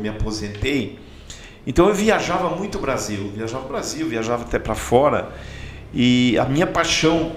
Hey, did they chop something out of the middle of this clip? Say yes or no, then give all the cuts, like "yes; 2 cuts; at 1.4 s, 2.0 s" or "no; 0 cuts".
no; 0 cuts